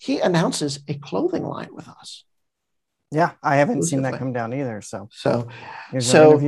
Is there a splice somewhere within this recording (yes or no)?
no